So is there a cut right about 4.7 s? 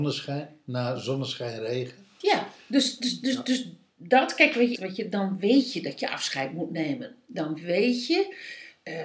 yes; 1 cut; at 4.7 s

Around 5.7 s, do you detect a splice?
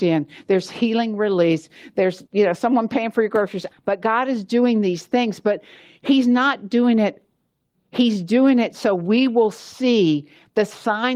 no; 3 cuts; at 2.3 s, 3.7 s, 7.7 s

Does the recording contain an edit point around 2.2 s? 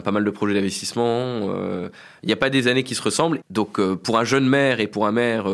no; 0 cuts

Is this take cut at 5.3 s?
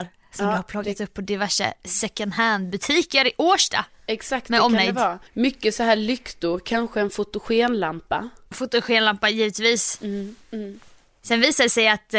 yes; 1 cut; at 5.3 s

